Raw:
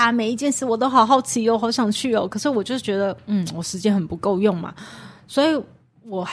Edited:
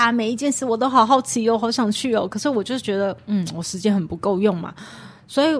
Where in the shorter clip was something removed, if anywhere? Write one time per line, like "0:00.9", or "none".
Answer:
none

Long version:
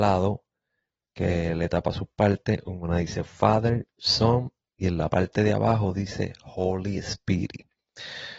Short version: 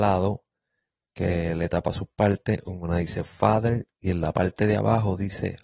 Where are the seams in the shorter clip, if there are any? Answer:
0:03.9

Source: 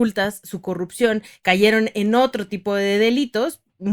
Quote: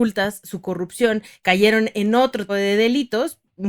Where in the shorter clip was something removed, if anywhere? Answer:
0:02.5

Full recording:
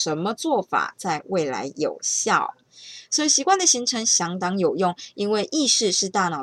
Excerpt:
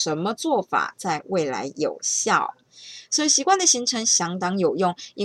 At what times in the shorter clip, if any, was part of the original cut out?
none

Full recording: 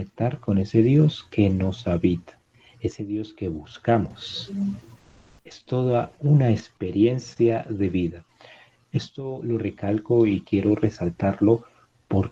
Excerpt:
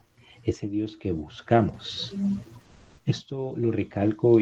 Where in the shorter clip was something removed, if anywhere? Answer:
0:03.0

